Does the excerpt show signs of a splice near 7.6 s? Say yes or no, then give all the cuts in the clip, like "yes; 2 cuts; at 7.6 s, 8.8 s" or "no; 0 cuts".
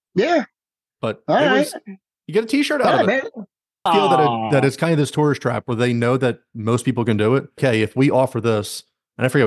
yes; 3 cuts; at 2.1 s, 3.9 s, 7.6 s